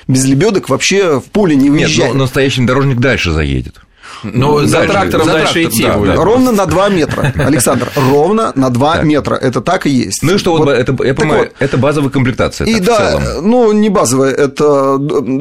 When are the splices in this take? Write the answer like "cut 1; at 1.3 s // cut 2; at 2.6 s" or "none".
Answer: none